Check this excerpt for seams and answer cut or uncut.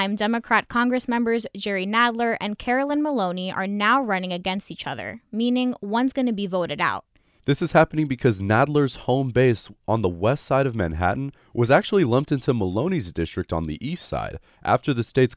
cut